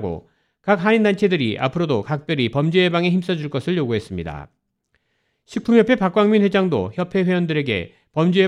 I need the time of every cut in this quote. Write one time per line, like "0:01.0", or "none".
none